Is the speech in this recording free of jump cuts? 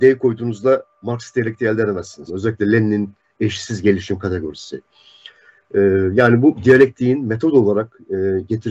no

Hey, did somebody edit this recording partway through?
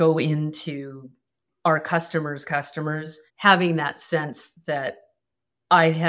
yes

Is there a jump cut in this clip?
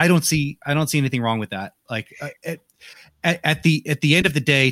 no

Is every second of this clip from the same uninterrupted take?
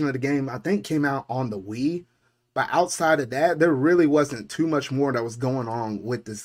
yes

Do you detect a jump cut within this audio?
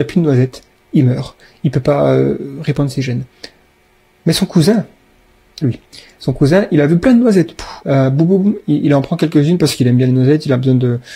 yes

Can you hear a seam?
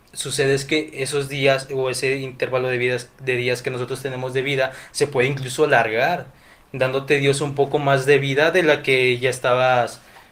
no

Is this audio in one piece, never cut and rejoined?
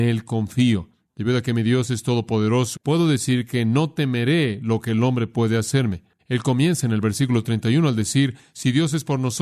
no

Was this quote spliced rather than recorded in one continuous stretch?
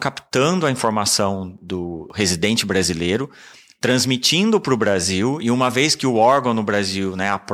no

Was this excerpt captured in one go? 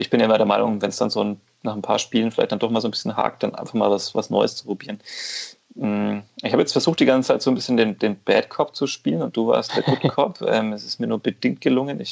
yes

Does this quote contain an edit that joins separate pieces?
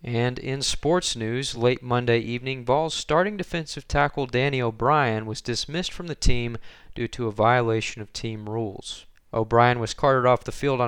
no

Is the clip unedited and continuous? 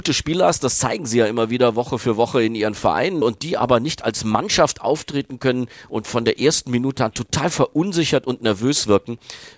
no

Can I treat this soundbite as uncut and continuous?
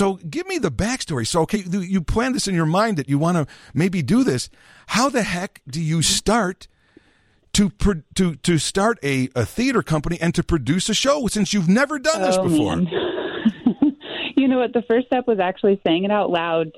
no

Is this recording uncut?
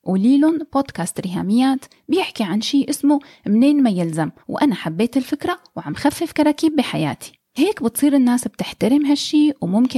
no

